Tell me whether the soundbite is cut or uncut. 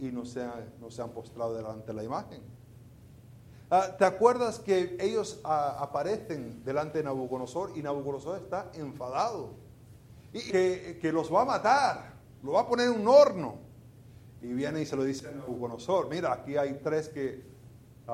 cut